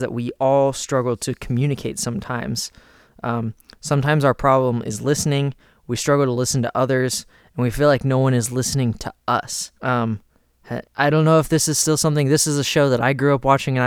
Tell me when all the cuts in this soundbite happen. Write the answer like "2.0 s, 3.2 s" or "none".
9.8 s, 10.9 s